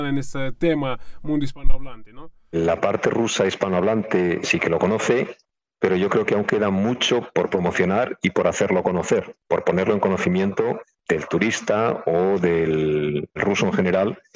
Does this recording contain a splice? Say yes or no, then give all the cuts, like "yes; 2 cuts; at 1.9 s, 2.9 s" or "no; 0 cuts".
no; 0 cuts